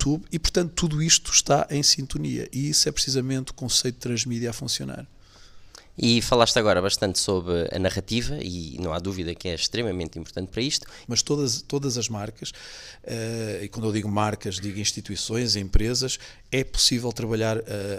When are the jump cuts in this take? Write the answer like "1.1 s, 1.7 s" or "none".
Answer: 11.0 s